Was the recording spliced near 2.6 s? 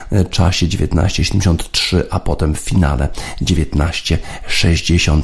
no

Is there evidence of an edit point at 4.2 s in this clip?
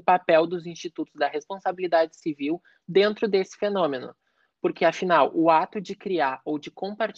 no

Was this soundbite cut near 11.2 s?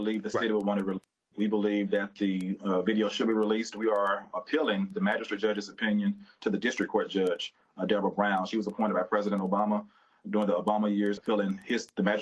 yes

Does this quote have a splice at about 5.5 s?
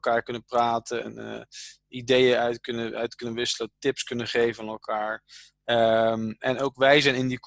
no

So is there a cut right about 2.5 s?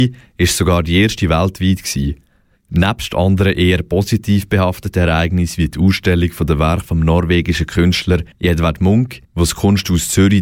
yes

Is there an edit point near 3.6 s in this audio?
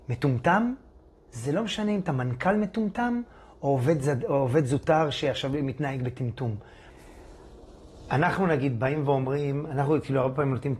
no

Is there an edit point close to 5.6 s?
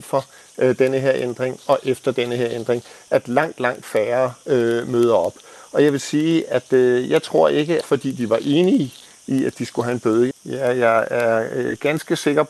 no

